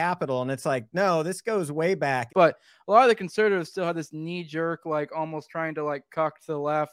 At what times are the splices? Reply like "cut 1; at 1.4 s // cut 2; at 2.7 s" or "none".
cut 1; at 2.3 s